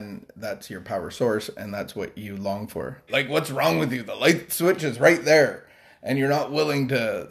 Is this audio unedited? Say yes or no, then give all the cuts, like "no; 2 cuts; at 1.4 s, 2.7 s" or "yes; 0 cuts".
no; 1 cut; at 3.1 s